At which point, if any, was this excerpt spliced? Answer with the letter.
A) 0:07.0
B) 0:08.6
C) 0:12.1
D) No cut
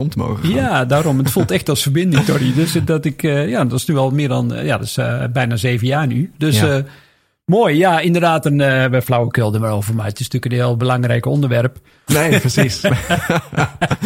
C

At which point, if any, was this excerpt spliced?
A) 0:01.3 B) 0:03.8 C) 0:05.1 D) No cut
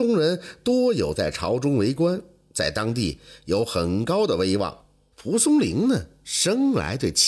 C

